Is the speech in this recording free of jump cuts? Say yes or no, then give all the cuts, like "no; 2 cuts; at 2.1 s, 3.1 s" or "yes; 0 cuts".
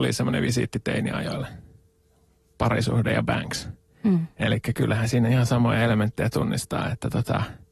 yes; 0 cuts